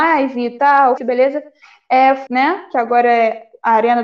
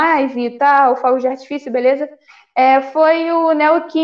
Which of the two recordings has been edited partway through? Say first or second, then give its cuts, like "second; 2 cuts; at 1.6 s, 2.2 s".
first; 2 cuts; at 1.0 s, 2.3 s